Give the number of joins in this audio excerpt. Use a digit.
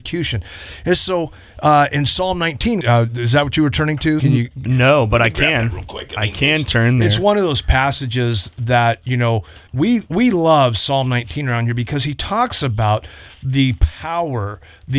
3